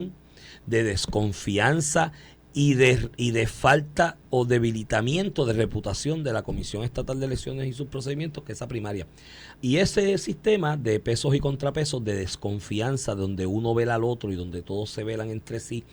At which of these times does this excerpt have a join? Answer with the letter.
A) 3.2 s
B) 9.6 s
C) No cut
B